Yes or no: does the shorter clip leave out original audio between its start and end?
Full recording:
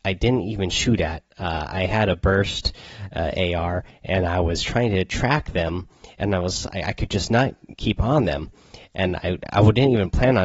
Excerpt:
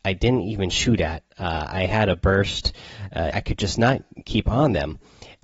yes